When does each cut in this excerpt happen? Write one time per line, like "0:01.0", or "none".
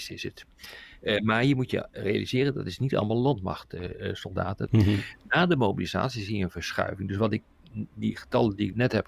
0:04.7